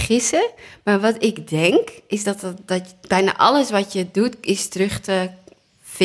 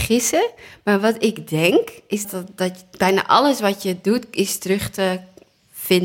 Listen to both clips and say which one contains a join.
second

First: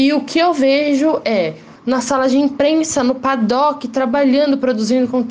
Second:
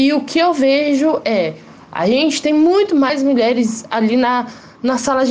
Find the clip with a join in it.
first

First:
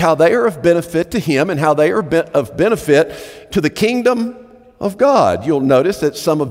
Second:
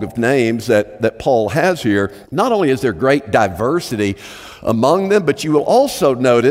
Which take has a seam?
second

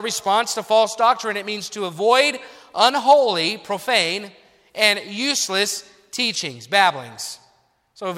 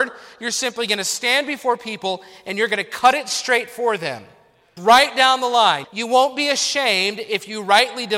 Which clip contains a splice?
second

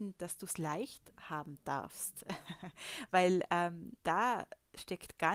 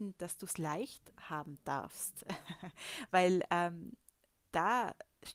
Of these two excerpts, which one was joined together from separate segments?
first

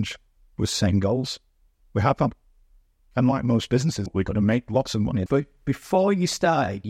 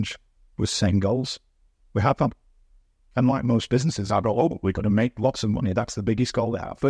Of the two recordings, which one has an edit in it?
first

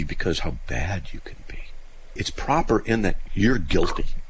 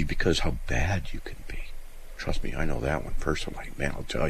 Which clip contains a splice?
first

